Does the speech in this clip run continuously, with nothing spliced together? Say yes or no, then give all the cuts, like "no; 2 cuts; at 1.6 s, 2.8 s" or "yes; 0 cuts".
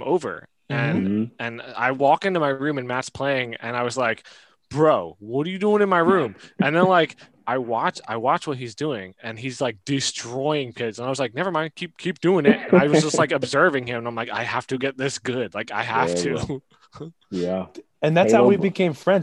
yes; 0 cuts